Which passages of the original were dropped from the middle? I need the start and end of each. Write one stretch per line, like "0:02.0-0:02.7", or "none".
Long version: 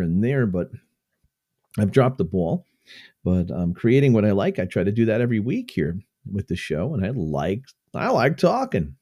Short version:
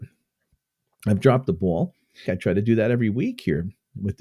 0:03.0-0:04.5